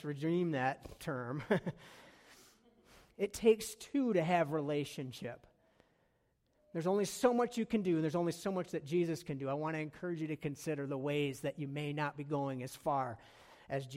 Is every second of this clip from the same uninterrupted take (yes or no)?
yes